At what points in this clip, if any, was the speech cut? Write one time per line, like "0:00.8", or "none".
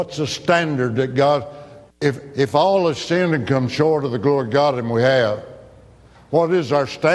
none